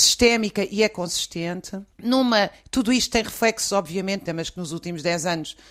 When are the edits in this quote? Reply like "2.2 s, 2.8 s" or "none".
1.9 s, 4.3 s